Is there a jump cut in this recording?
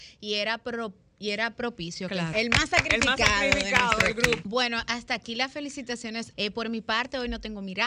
yes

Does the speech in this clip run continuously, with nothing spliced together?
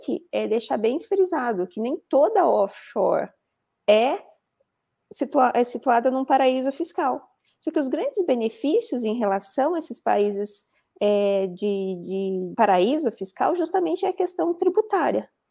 no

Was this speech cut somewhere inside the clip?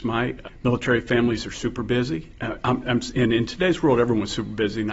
no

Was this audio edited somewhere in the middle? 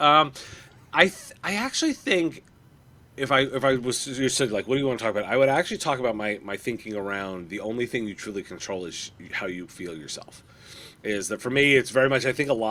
no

